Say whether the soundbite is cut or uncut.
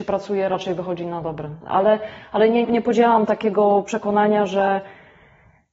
cut